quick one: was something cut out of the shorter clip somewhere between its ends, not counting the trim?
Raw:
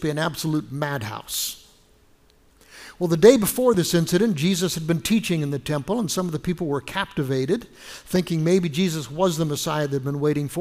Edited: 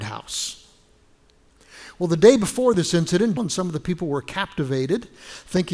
yes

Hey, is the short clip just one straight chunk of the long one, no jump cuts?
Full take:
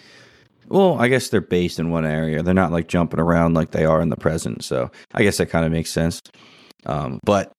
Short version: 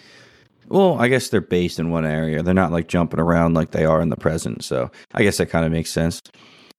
yes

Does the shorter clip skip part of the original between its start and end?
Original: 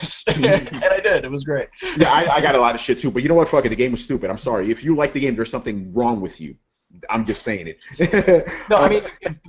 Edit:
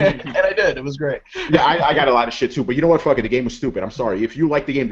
no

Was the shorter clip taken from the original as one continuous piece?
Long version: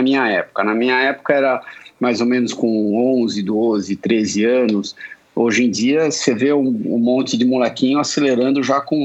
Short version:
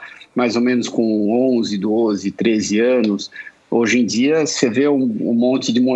yes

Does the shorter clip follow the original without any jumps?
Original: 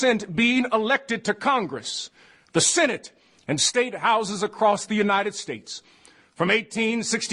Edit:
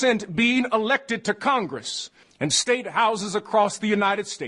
no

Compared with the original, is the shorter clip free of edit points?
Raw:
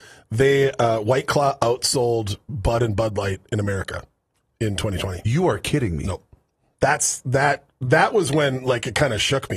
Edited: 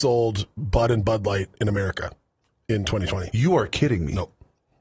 yes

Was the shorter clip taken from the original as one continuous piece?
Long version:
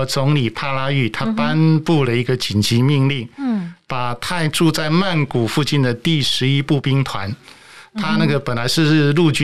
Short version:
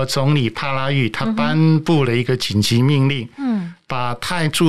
yes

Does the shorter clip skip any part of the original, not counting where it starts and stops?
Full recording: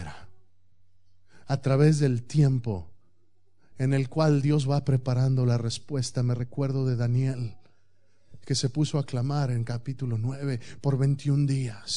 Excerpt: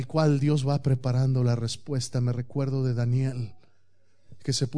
no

